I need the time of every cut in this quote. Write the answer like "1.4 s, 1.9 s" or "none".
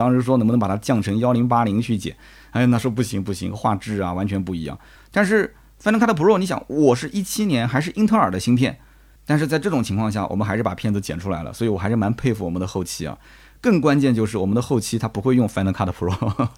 5.0 s, 9.2 s

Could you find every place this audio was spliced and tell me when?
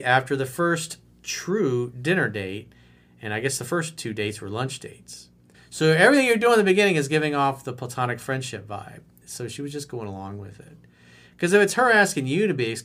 5.5 s, 9.2 s

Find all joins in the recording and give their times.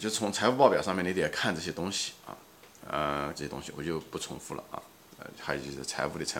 3.3 s, 5.1 s

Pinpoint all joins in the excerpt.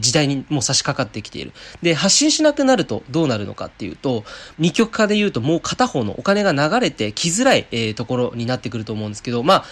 1.8 s, 4.5 s

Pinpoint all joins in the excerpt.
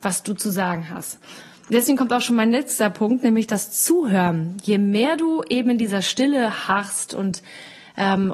none

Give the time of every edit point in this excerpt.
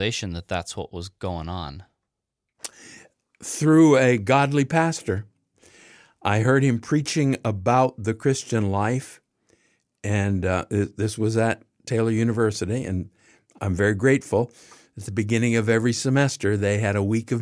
none

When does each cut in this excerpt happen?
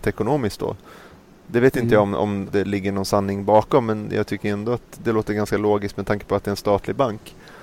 2.5 s

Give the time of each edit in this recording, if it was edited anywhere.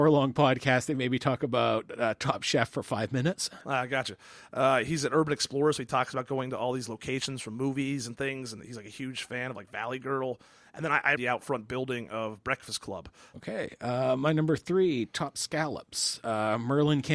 3.6 s, 11.1 s, 13.3 s

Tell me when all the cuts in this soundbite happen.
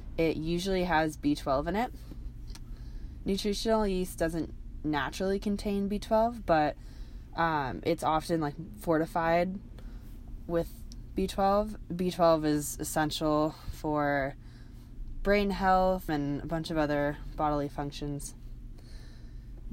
11.8 s, 16.1 s

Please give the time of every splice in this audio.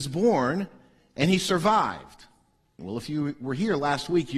2.8 s

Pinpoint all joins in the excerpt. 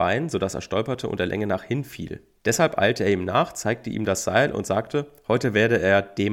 2.4 s

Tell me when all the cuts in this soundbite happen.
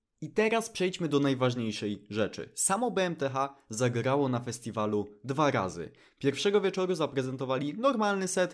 none

